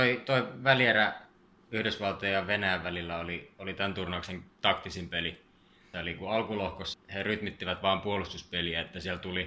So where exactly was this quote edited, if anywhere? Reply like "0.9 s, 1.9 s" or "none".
5.9 s, 6.9 s